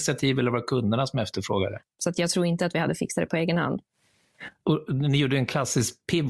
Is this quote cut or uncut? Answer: cut